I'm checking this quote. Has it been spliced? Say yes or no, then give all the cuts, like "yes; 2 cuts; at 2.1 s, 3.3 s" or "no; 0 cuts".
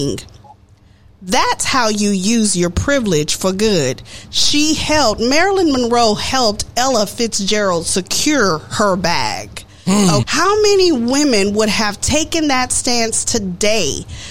yes; 1 cut; at 10.2 s